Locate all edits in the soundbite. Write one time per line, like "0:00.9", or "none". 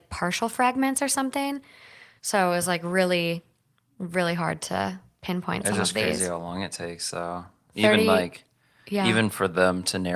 none